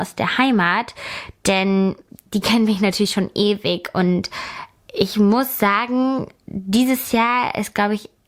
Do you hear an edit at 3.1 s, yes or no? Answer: no